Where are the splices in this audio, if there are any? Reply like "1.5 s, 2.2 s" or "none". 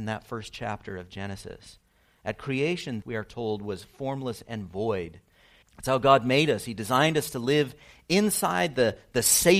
3.0 s, 5.6 s